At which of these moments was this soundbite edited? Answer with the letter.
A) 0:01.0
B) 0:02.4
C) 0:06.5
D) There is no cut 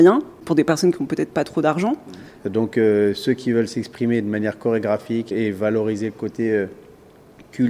B